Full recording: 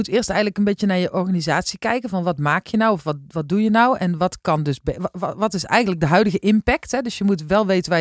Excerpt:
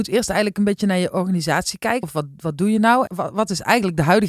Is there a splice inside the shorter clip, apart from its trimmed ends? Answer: yes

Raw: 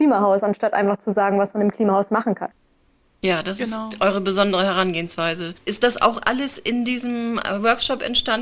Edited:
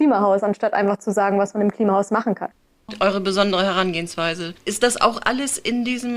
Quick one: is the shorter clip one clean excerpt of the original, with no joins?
no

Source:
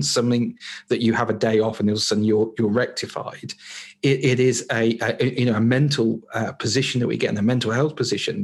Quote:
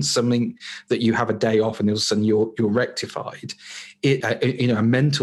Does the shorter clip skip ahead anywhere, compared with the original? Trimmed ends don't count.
yes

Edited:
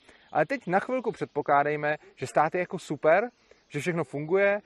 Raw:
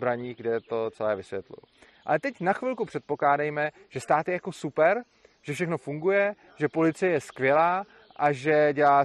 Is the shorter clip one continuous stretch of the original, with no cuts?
yes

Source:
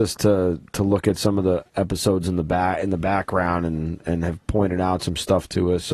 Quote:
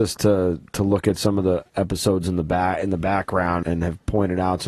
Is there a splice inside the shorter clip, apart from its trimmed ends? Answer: yes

